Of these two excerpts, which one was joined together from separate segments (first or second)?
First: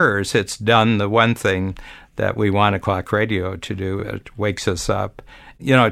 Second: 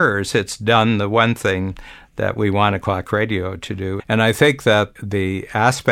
second